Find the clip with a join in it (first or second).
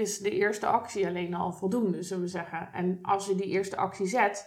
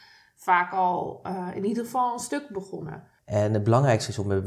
second